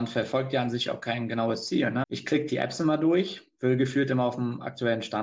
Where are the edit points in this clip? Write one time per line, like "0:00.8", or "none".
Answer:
0:02.0